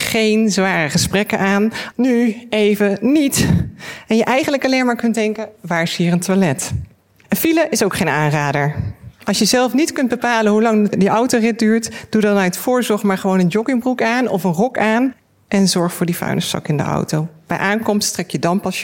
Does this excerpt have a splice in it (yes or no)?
yes